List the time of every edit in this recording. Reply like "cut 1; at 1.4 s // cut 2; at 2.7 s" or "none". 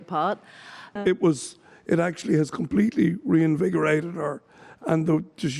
cut 1; at 1.0 s